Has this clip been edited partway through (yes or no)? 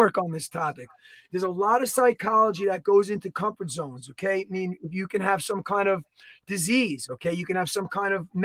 no